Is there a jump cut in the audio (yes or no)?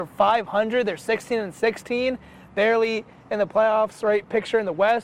no